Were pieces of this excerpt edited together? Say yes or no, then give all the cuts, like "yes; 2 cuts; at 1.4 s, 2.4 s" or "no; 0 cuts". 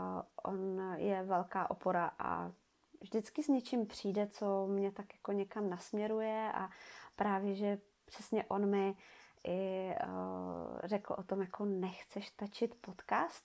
no; 0 cuts